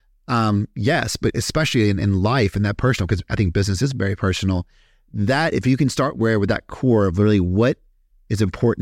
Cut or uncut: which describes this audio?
uncut